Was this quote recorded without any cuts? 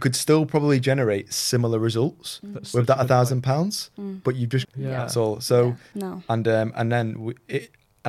no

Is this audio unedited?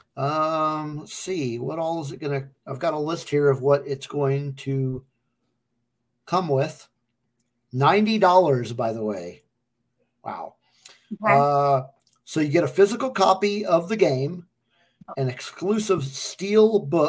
yes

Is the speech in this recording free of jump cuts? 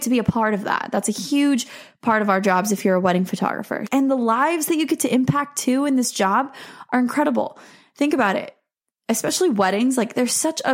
no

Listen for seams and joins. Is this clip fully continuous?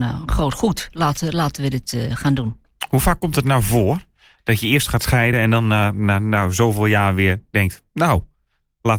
yes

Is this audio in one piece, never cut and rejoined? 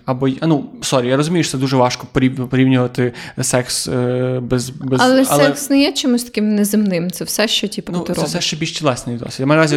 no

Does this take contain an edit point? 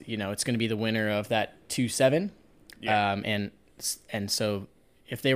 no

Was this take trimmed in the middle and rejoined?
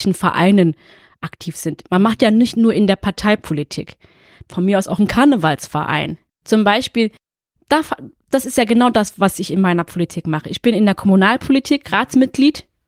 yes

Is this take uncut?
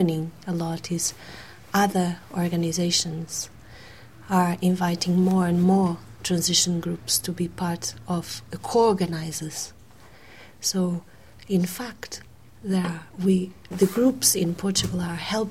no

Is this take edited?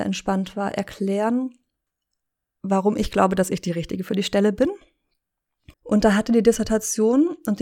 yes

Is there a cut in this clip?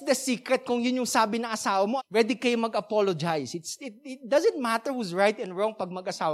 yes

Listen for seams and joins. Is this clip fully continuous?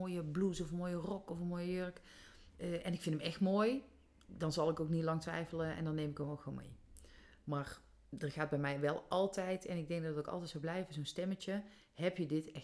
yes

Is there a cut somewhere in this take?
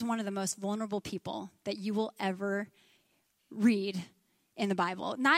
no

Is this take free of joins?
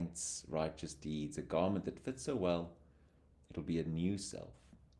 yes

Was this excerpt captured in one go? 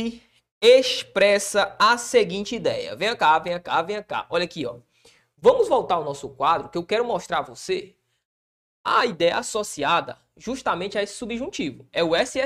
yes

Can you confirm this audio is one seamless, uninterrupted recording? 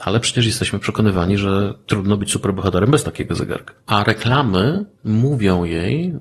no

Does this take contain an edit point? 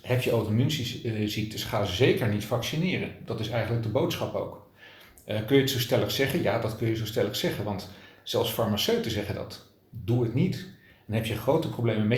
no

